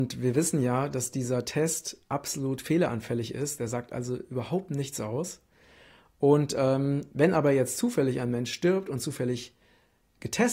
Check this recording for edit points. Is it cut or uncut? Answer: uncut